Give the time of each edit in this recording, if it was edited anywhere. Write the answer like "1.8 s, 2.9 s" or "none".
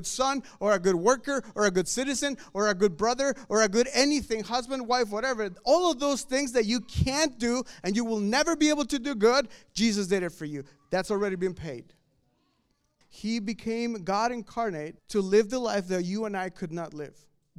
13.0 s, 15.0 s